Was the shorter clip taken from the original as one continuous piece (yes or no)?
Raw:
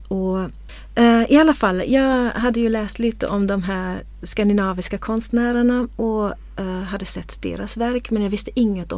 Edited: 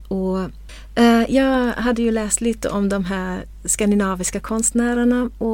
no